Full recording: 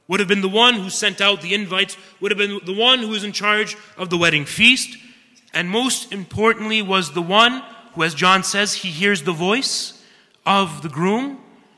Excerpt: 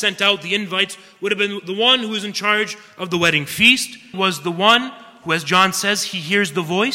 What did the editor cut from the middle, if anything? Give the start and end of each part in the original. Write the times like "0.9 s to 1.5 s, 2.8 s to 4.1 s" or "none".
5.1 s to 6.8 s